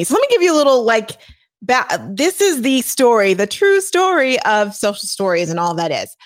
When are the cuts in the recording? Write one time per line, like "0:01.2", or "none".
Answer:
none